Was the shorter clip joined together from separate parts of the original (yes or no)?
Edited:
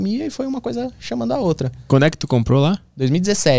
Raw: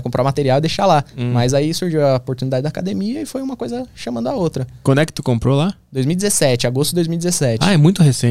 no